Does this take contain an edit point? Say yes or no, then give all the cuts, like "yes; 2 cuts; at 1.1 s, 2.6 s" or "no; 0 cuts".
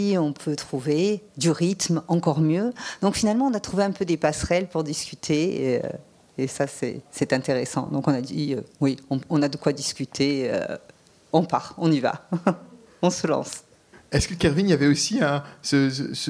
no; 0 cuts